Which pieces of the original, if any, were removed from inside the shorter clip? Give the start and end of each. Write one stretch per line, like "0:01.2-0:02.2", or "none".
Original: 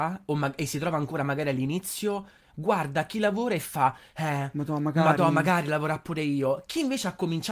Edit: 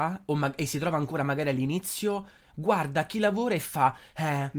none